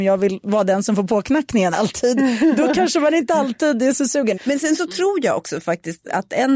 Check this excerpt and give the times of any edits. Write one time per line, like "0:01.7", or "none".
0:04.4